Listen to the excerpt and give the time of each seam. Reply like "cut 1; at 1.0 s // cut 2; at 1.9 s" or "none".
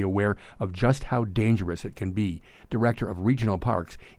cut 1; at 2.6 s